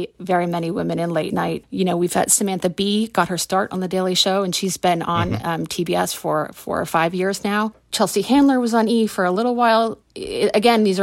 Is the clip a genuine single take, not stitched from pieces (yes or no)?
yes